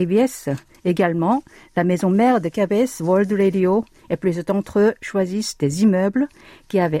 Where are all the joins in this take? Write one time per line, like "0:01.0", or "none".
none